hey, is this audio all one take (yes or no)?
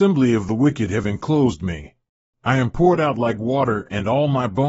no